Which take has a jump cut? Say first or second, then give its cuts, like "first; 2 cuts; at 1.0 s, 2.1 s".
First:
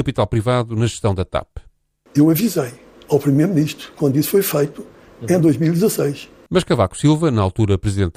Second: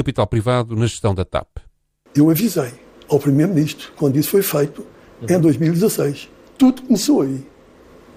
first; 1 cut; at 6.5 s